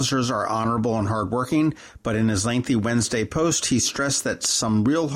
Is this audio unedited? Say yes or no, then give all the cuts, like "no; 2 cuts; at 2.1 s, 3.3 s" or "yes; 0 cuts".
yes; 0 cuts